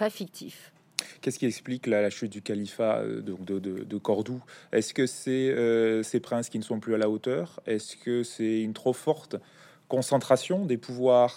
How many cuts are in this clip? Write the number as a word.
zero